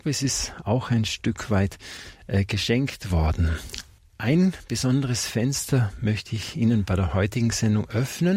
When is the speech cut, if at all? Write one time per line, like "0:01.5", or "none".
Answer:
none